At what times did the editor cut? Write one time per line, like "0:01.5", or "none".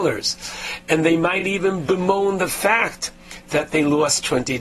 none